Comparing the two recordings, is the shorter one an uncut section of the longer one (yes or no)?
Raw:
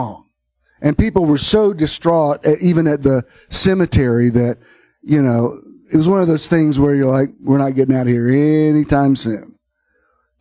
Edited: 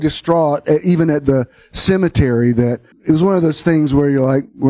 no